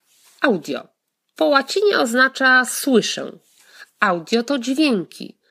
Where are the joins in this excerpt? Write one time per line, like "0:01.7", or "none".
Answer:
none

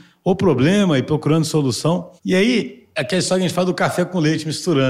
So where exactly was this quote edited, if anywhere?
0:02.2

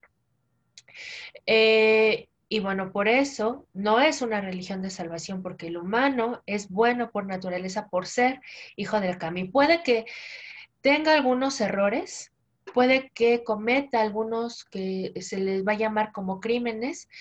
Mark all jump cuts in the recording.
0:03.7

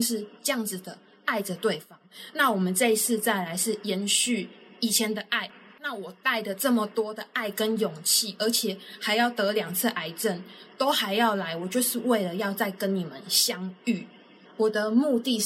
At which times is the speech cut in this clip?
0:14.5

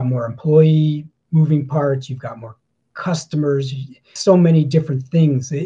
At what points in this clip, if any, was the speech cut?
0:04.2

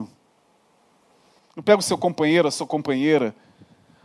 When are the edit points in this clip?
0:01.4

